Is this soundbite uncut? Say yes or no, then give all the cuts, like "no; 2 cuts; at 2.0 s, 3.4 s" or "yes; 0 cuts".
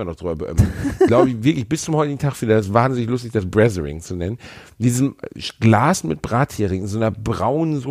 yes; 0 cuts